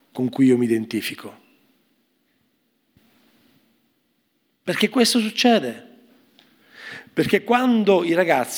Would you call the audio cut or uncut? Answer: uncut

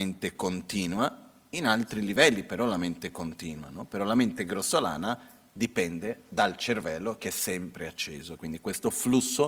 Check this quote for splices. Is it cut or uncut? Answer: cut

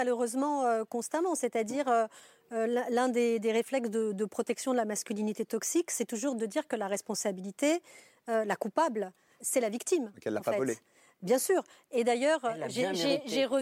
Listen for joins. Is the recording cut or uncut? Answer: cut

